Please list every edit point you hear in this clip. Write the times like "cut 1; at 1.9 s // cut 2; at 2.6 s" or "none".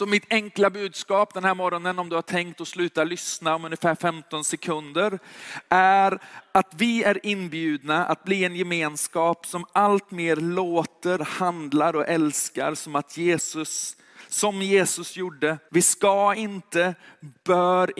cut 1; at 11.2 s // cut 2; at 15.7 s